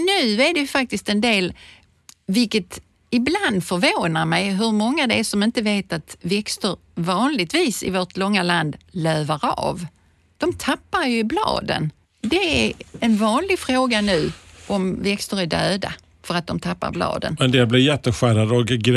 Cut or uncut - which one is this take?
uncut